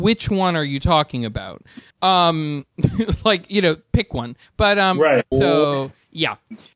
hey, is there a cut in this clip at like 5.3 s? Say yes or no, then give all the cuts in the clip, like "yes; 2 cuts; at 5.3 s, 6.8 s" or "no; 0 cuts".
yes; 1 cut; at 5.3 s